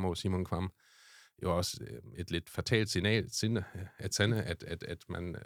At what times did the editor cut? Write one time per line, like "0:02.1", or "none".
none